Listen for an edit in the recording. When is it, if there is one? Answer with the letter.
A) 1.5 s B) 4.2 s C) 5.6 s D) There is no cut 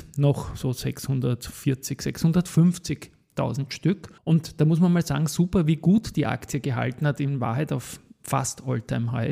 B